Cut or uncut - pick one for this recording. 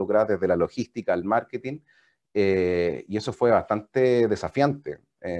uncut